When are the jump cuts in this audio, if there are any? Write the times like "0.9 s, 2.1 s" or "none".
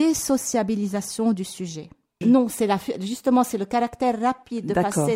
2.2 s

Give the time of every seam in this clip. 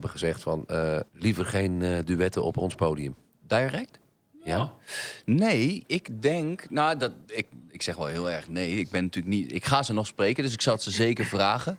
1.1 s

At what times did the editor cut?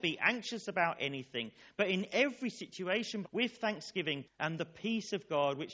3.2 s, 4.2 s

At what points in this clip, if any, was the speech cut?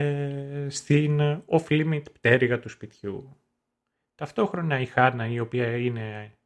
none

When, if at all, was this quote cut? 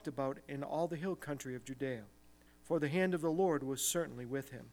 2.5 s

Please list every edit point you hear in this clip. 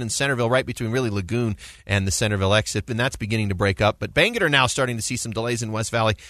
2.9 s

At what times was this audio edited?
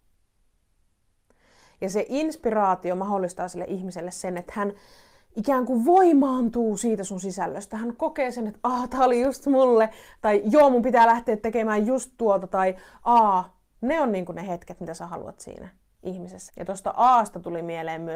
13.7 s, 16.5 s

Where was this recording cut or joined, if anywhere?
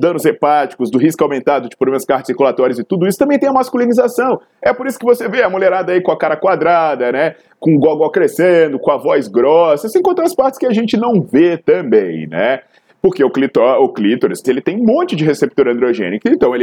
14.4 s

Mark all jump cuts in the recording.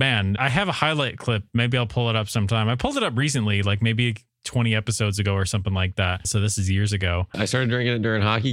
6.2 s, 7.3 s

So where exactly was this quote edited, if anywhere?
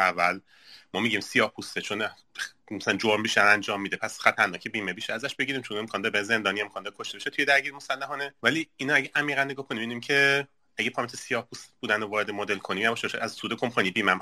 8.4 s

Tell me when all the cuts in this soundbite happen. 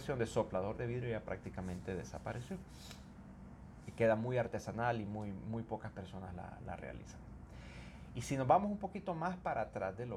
none

